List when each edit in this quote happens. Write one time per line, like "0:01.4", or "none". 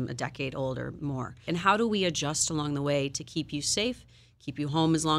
0:01.5